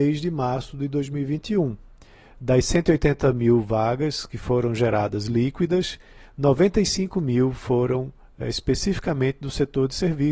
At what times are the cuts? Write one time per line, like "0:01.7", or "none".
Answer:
none